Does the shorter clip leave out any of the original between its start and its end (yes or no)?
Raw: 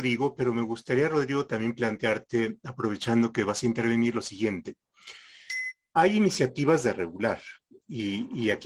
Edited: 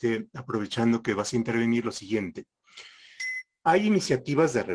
no